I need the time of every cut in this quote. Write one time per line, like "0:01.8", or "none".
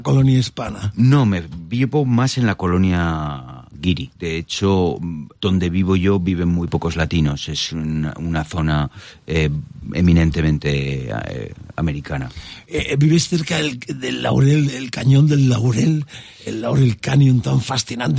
0:04.1